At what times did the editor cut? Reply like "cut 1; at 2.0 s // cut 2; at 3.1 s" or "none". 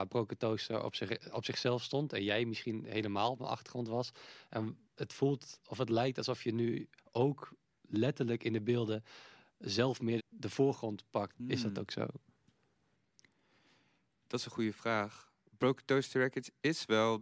cut 1; at 10.2 s // cut 2; at 11.3 s